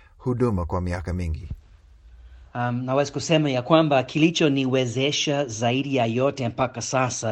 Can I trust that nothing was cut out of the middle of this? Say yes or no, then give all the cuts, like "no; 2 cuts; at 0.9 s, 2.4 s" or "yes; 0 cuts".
no; 1 cut; at 2.5 s